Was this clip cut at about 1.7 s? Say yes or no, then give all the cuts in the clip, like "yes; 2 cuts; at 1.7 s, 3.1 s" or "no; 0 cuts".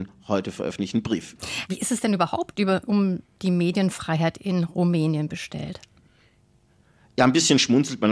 yes; 1 cut; at 1.7 s